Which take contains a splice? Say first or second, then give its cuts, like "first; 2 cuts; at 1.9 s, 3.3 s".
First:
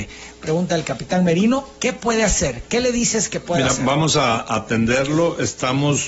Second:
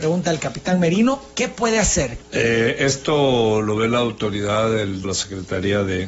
second; 2 cuts; at 2.2 s, 5.0 s